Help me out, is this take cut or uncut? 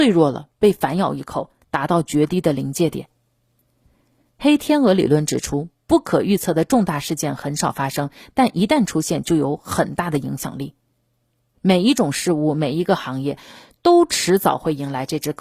uncut